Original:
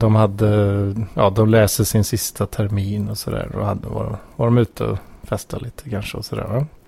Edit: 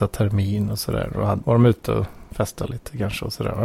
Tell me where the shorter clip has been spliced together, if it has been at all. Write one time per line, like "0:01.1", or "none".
0:01.4